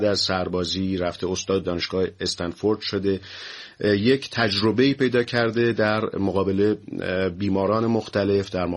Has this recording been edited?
yes; 1 cut; at 1.6 s

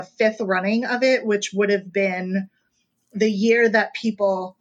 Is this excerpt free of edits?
yes; 0 cuts

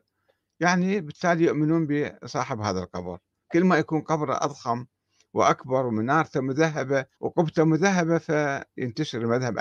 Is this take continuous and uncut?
no; 1 cut; at 7.1 s

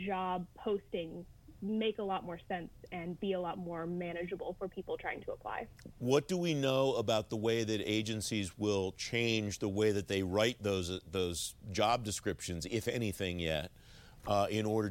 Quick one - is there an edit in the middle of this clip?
no; 0 cuts

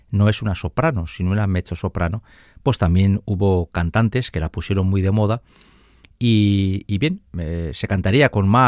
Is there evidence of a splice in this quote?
no; 0 cuts

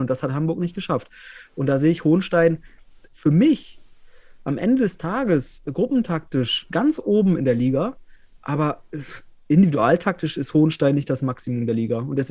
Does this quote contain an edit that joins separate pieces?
yes; 1 cut; at 3.1 s

